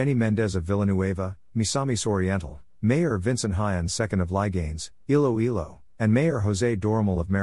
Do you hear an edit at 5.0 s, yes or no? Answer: no